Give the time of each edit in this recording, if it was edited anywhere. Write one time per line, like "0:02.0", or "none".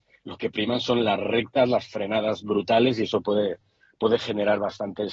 none

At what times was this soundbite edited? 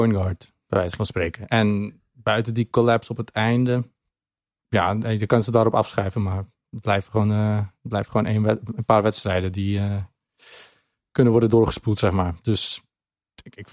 none

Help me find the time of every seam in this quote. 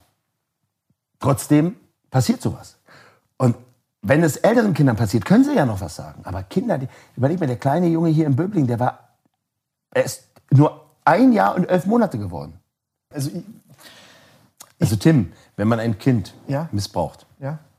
0:13.1

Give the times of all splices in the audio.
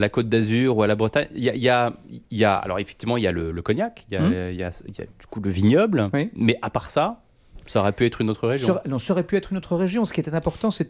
none

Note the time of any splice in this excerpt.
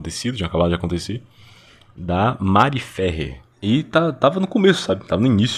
0:03.5

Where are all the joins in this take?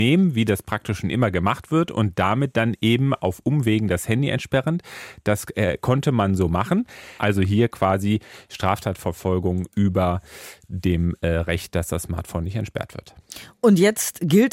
0:07.2

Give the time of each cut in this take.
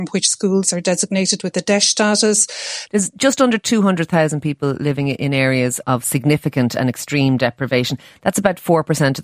0:02.9
0:05.8

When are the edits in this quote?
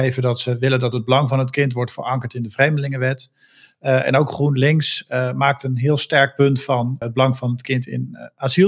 0:07.0

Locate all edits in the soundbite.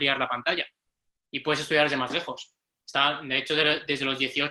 0:02.6

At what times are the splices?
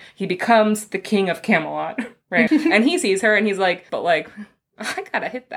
0:02.5
0:03.9

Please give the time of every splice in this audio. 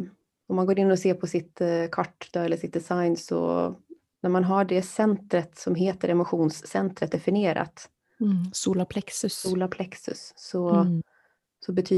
none

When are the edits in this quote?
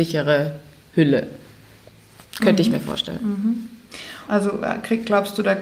0:04.3

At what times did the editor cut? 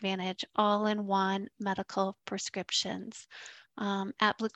none

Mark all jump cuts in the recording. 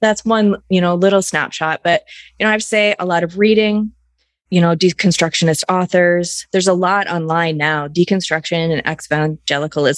none

